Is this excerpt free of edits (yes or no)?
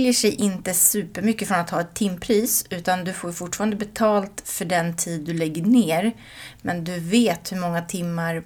yes